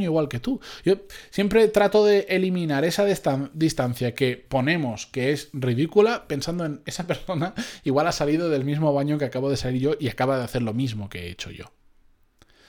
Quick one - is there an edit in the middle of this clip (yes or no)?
no